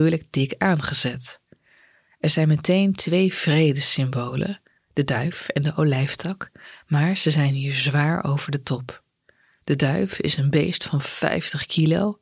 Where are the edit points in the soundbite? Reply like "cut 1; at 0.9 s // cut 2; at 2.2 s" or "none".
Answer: none